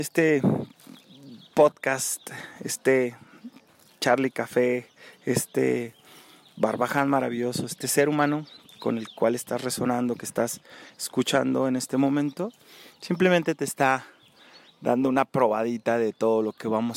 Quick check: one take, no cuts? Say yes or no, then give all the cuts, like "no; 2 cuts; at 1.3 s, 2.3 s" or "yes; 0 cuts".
yes; 0 cuts